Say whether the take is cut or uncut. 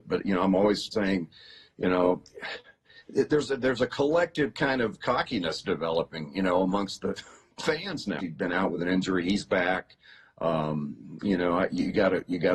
cut